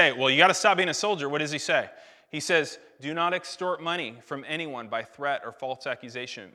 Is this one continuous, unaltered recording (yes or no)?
yes